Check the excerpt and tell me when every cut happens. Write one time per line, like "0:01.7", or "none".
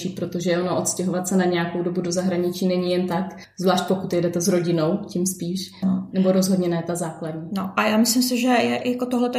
0:05.8

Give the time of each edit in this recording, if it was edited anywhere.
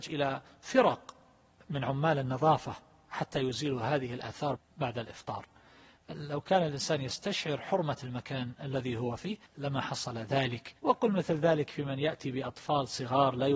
0:04.6
0:09.5
0:10.8

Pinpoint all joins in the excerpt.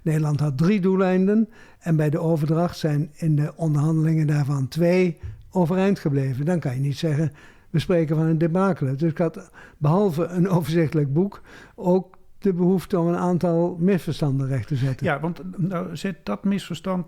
none

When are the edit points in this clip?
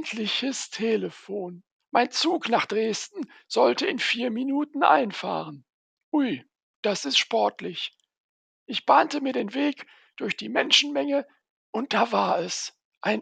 0:01.8

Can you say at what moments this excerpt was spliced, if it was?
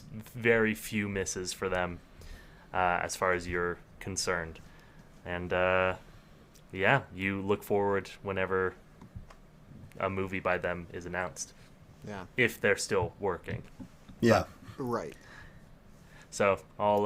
none

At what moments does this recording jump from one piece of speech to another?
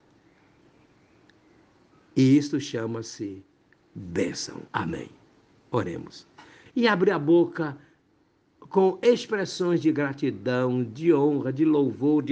0:04.7
0:06.7

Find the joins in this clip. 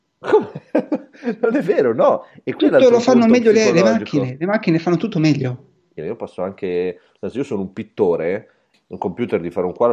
0:06.0
0:08.7

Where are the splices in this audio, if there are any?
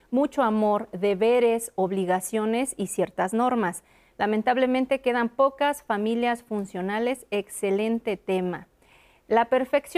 none

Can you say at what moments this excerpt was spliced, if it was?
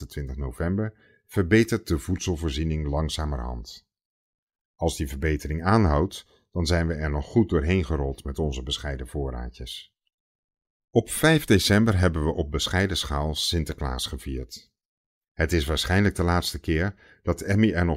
none

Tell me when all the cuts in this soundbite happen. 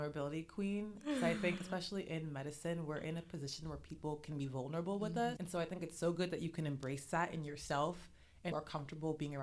0:05.4
0:08.5

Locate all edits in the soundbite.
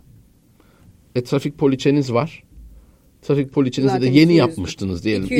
none

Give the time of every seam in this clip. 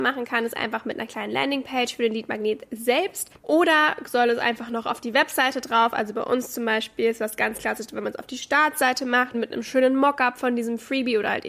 0:03.4
0:09.3

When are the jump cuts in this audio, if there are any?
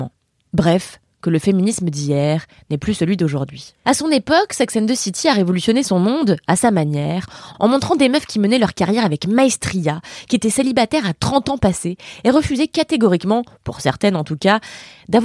0:03.8
0:07.5

